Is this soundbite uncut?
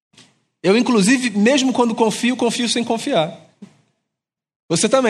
yes; 0 cuts

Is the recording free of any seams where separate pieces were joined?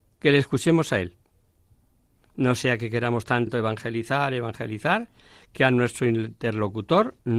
yes; 0 cuts

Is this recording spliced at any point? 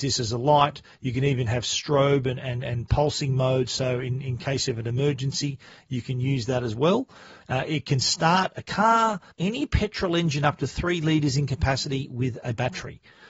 yes; 2 cuts; at 7.4 s, 9.3 s

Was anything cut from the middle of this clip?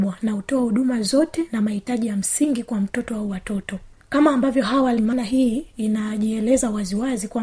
no; 0 cuts

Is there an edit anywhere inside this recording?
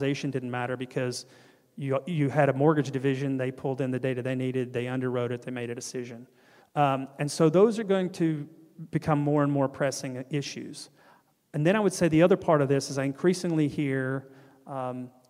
yes; 1 cut; at 6.6 s

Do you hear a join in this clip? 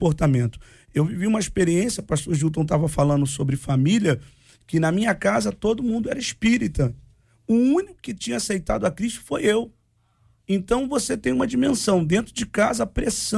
no; 0 cuts

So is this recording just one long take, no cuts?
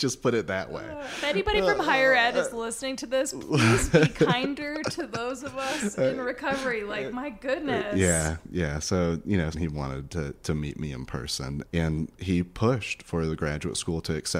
no; 2 cuts; at 9.5 s, 11.6 s

